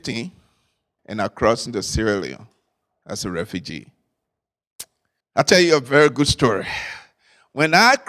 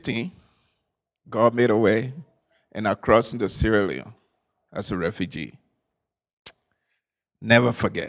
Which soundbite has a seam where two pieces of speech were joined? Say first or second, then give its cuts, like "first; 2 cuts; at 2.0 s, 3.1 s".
first; 2 cuts; at 1.0 s, 5.2 s